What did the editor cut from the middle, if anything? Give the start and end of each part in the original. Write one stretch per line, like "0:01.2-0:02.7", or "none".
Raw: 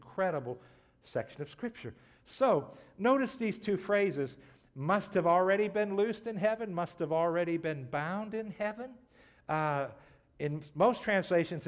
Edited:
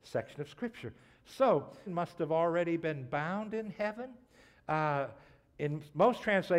0:02.9-0:06.7